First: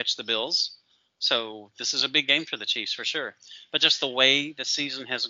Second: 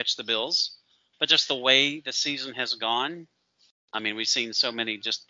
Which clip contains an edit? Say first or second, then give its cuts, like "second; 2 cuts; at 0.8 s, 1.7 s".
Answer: second; 1 cut; at 1.1 s